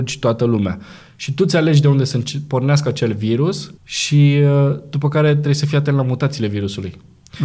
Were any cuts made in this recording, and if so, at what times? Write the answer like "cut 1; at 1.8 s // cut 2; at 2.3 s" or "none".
cut 1; at 3.8 s